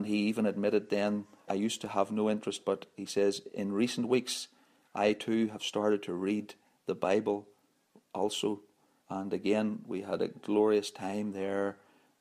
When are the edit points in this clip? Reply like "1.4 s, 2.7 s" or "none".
1.5 s, 9.0 s